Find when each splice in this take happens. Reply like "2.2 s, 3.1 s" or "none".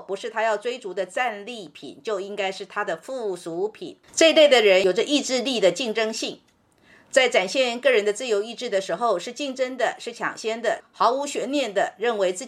10.8 s